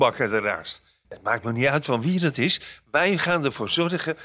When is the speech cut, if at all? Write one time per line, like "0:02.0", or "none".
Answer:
0:01.0